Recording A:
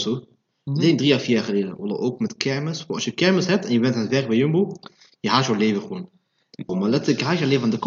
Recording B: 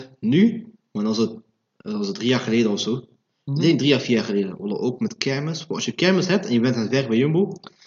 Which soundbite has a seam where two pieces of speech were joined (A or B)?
A